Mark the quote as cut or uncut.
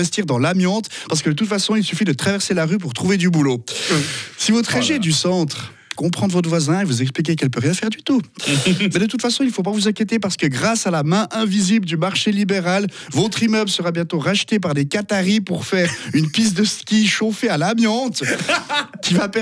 cut